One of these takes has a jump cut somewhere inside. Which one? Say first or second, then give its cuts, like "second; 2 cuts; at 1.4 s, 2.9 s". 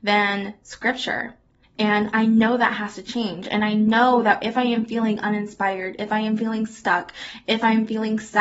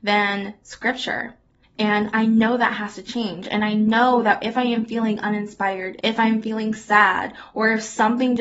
second; 1 cut; at 6.0 s